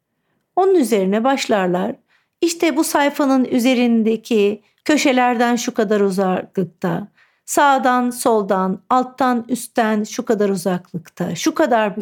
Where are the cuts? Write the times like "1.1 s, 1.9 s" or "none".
4.8 s